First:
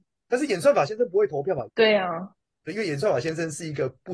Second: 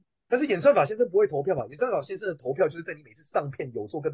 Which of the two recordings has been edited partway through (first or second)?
first